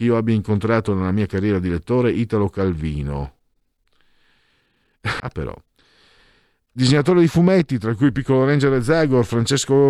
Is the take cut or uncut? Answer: cut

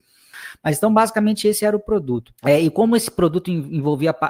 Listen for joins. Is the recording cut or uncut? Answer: cut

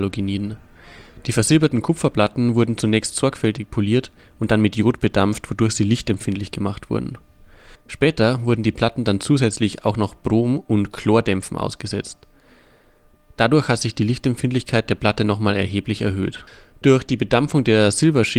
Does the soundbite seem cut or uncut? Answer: uncut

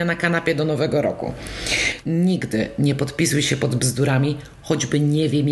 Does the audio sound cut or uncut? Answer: cut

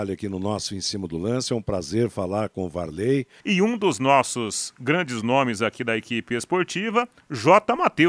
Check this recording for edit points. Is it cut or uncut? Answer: cut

